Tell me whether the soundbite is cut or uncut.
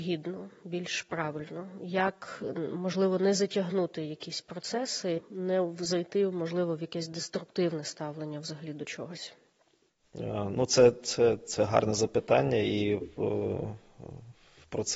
uncut